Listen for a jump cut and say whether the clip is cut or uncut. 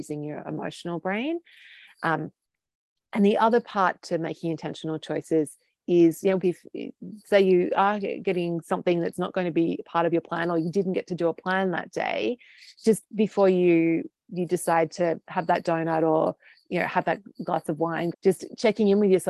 cut